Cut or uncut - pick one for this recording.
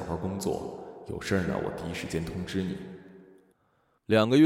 uncut